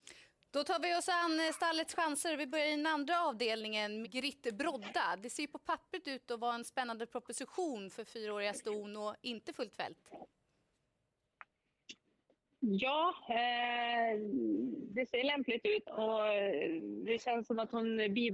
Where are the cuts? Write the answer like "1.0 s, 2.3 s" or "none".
4.0 s, 15.8 s